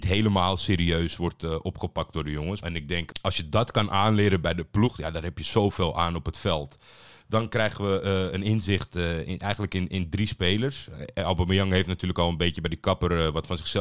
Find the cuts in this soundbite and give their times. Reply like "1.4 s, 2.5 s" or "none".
2.6 s